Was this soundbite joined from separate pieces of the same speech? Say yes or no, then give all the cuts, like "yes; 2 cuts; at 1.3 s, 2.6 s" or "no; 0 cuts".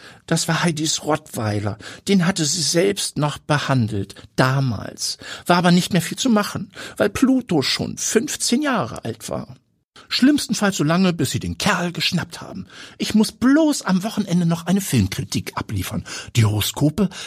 yes; 1 cut; at 10.0 s